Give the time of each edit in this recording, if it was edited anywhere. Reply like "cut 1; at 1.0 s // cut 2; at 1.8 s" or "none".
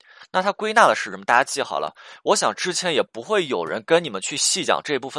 none